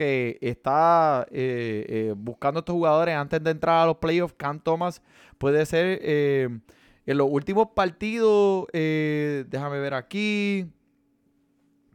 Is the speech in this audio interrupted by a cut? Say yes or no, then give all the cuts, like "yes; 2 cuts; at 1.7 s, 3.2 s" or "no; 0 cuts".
no; 0 cuts